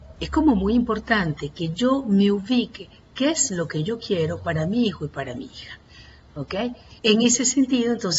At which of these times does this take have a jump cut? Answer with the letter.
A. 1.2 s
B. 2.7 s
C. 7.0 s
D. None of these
C